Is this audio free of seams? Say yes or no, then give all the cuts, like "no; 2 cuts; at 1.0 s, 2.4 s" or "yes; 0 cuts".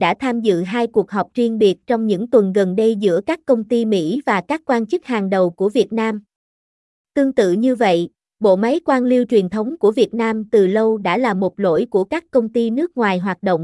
no; 1 cut; at 6.9 s